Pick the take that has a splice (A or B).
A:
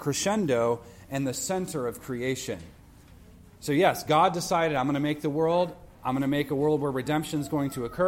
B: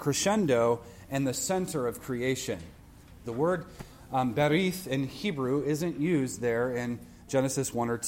B